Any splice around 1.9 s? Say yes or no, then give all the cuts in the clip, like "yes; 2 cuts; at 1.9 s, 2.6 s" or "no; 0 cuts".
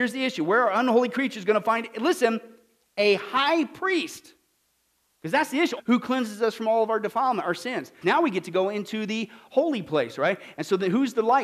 no; 2 cuts; at 5.8 s, 8.0 s